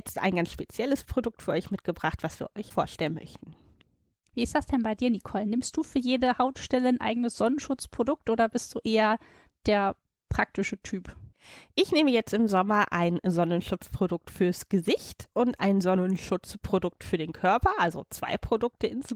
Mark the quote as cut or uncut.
uncut